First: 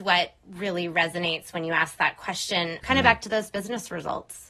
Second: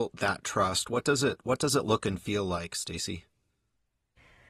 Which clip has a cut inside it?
first; 1 cut; at 2.8 s

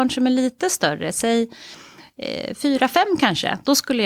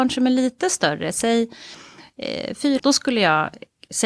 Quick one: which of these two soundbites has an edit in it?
second; 1 cut; at 2.8 s

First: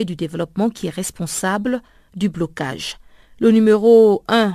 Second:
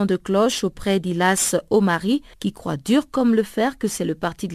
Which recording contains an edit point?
second; 1 cut; at 2.3 s

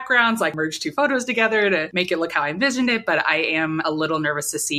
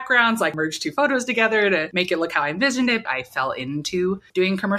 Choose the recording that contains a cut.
second; 1 cut; at 3.1 s

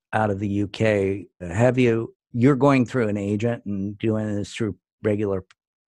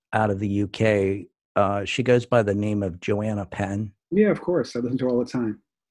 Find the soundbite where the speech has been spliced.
first; 1 cut; at 1.4 s

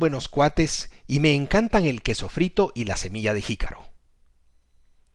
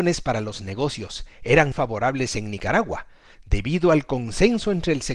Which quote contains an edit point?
second; 1 cut; at 1.7 s

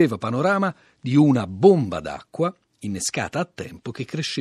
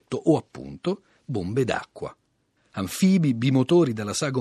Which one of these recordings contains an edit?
second; 1 cut; at 2.6 s

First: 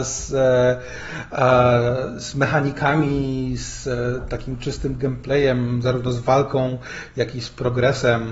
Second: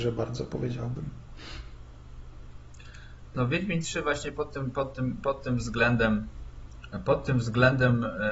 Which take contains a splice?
second; 1 cut; at 3.3 s

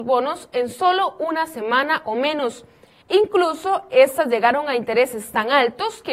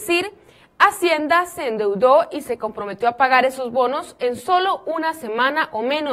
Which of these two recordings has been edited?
first; 1 cut; at 3.0 s

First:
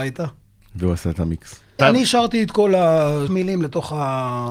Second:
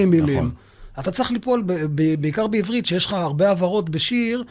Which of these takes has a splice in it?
first; 2 cuts; at 1.8 s, 3.3 s

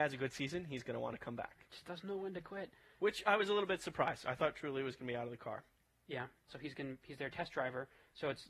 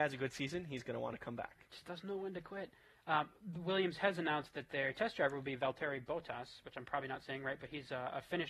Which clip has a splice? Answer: first; 2 cuts; at 3.0 s, 6.5 s

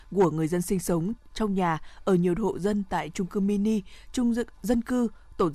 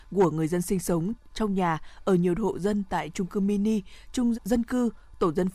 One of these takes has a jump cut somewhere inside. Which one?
second; 1 cut; at 4.3 s

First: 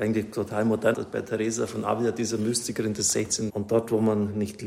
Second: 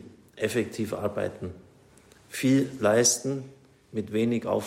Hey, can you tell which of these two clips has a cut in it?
first; 2 cuts; at 0.9 s, 3.5 s

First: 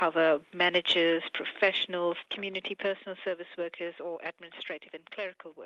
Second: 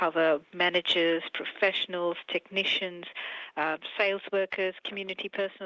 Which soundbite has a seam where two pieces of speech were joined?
first; 1 cut; at 2.3 s

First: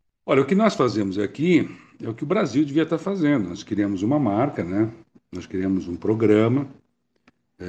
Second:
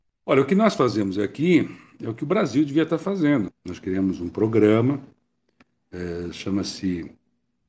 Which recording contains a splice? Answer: second; 1 cut; at 3.5 s

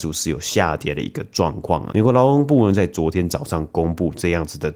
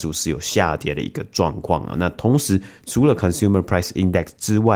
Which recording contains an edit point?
first; 1 cut; at 1.9 s

